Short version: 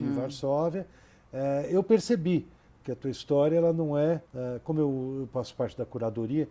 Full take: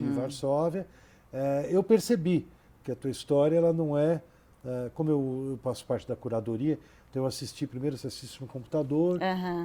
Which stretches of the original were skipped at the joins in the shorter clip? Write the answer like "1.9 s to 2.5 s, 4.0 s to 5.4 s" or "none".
4.2 s to 4.6 s